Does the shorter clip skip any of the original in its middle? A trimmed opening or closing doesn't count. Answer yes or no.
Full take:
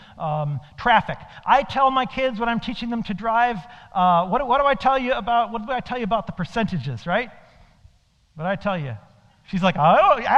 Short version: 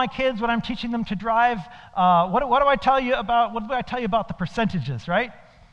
no